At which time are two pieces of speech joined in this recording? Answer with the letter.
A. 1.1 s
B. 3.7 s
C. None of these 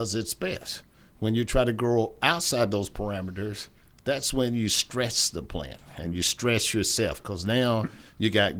C